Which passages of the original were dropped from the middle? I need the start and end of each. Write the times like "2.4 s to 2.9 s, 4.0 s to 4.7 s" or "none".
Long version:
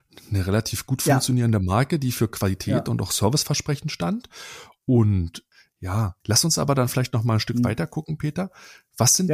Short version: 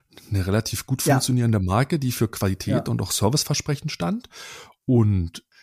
none

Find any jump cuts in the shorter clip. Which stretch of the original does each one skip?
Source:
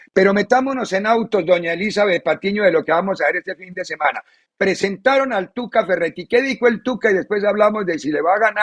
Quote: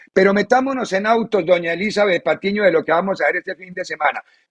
none

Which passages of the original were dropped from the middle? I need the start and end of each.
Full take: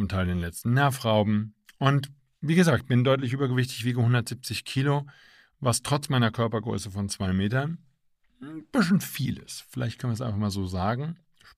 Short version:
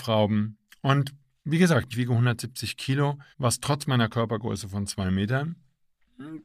2.9 s to 3.8 s, 5.2 s to 5.5 s

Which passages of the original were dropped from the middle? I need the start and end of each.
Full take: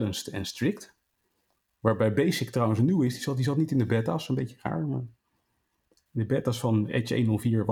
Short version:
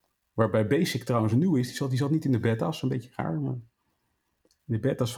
none

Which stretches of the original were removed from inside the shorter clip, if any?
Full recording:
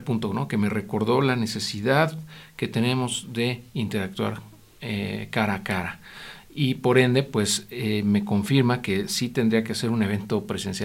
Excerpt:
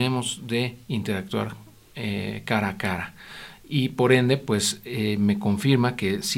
none

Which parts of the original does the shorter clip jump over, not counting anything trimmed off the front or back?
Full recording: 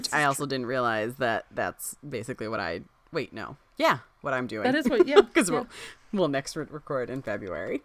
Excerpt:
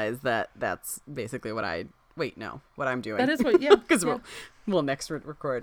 3.6 s to 4.1 s

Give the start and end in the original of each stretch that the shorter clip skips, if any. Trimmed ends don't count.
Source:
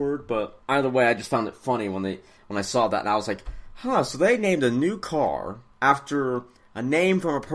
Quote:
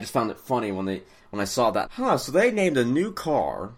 3.0 s to 3.7 s

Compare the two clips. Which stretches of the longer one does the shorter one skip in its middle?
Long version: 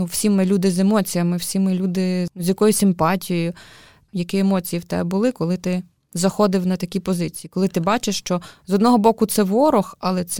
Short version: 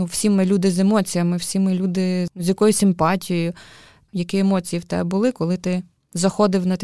none

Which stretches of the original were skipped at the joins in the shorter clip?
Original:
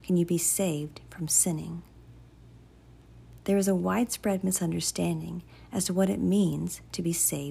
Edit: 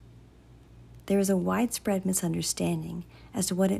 none

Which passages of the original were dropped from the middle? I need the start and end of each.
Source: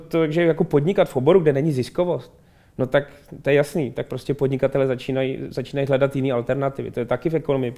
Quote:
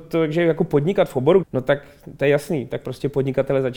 1.4 s to 2.7 s

